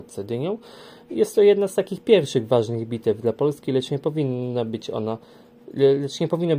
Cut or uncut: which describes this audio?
uncut